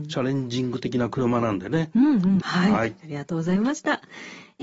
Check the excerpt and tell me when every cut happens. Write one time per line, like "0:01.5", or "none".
0:02.4